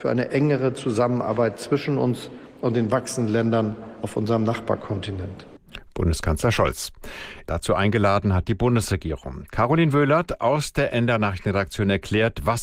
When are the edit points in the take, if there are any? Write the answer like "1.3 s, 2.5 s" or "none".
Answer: 7.5 s

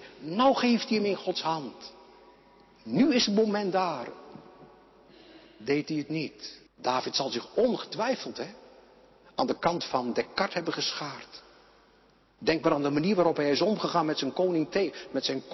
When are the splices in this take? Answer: 6.7 s, 12.4 s

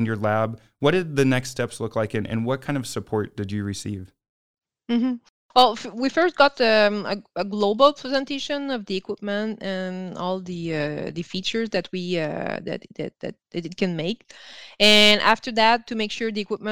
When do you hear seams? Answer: none

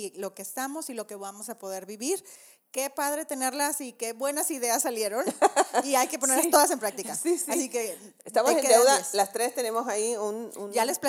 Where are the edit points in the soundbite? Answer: none

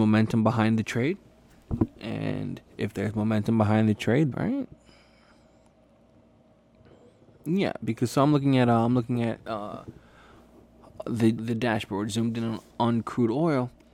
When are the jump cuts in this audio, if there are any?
4.3 s, 11.4 s

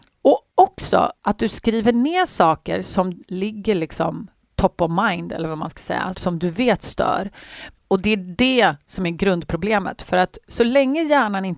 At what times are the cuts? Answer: 6.1 s, 7.7 s

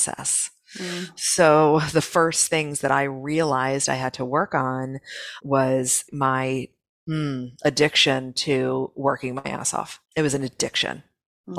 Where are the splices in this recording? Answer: 10.1 s

